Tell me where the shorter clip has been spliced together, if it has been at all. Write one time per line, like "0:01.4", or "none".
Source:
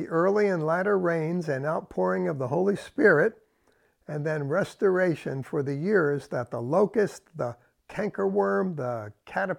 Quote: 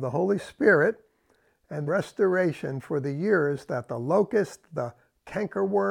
0:01.9